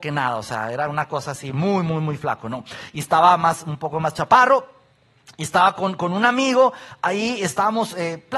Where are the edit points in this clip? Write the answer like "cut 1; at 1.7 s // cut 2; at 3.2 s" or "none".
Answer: none